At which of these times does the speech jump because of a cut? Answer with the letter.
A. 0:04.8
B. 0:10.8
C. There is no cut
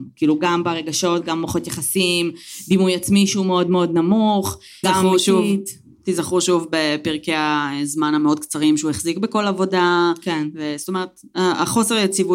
A